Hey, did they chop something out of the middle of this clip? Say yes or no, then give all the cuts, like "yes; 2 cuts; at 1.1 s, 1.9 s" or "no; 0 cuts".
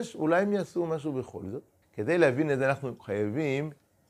yes; 1 cut; at 1.8 s